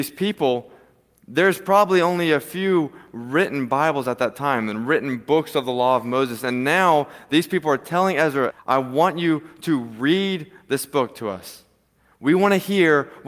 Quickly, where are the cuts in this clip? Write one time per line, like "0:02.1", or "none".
0:08.5